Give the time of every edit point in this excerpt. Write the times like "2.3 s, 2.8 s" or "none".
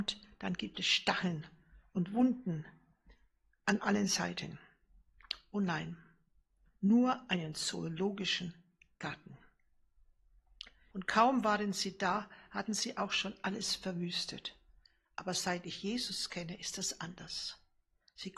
6.7 s, 10.9 s